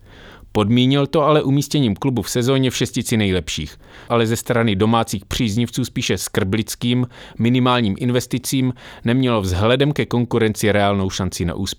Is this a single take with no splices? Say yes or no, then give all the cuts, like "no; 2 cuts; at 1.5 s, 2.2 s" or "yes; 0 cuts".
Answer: no; 1 cut; at 4.1 s